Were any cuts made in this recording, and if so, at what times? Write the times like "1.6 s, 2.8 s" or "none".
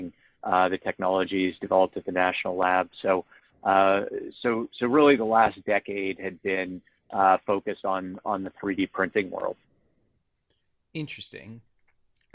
none